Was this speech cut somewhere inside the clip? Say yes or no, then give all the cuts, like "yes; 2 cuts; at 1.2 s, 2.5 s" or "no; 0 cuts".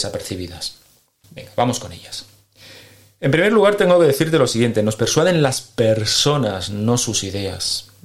yes; 1 cut; at 1.2 s